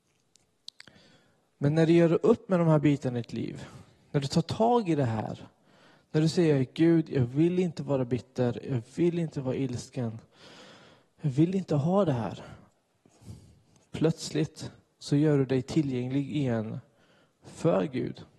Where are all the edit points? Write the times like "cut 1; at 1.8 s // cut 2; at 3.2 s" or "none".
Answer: none